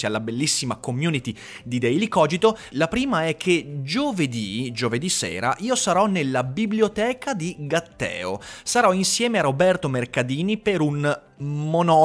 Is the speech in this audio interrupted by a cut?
yes; 1 cut; at 2.7 s

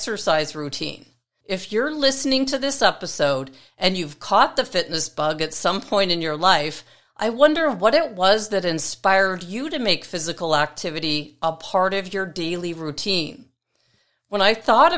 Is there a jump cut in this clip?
yes; 1 cut; at 1.4 s

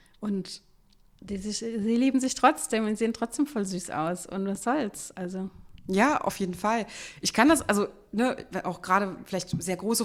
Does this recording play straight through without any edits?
yes; 0 cuts

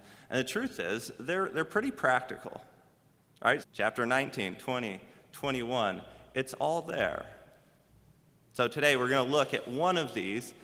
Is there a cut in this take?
yes; 1 cut; at 3.6 s

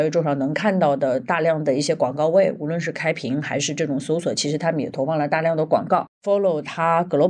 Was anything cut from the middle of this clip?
yes; 1 cut; at 6.1 s

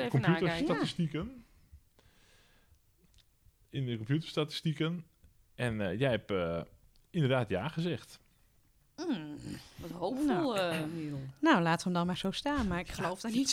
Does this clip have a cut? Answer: no; 0 cuts

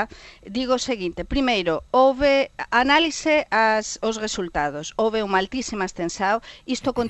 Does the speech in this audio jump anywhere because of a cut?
no; 0 cuts

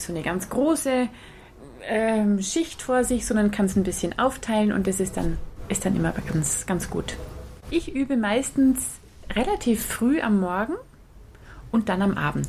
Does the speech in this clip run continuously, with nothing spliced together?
no; 1 cut; at 7.7 s

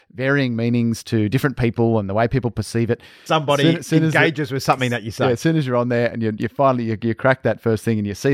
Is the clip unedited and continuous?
no; 1 cut; at 3.3 s

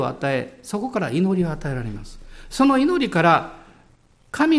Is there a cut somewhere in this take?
no; 0 cuts

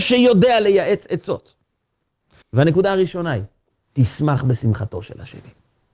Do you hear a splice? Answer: yes; 2 cuts; at 2.4 s, 3.7 s

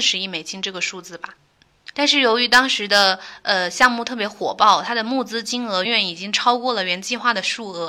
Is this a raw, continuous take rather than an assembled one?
no; 2 cuts; at 1.9 s, 5.8 s

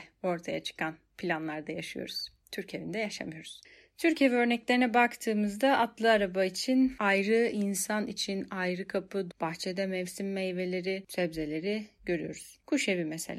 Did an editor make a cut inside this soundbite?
yes; 1 cut; at 9.3 s

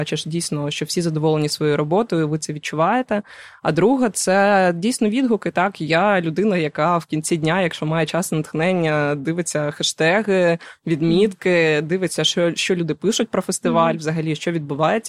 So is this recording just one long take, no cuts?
yes; 0 cuts

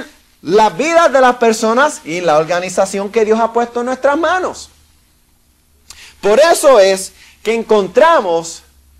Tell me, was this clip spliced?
no; 0 cuts

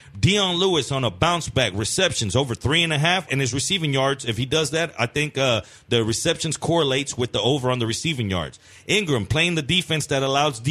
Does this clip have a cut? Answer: yes; 1 cut; at 3.3 s

